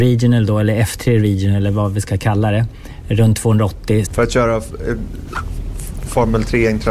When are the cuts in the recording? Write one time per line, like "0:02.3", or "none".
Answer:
0:04.1